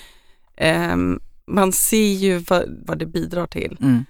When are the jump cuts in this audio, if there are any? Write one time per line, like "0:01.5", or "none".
0:01.4
0:02.9